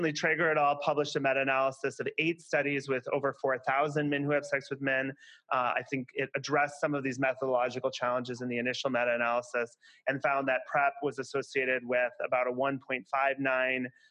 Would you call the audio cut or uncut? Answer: uncut